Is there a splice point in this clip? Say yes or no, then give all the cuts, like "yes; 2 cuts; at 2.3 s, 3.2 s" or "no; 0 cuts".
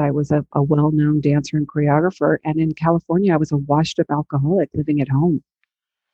no; 0 cuts